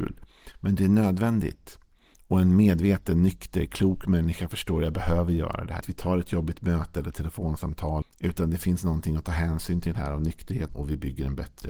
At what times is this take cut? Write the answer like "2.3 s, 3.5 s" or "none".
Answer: 5.8 s, 8.0 s, 10.7 s